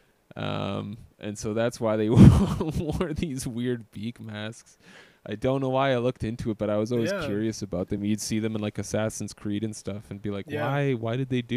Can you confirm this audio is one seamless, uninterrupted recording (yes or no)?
yes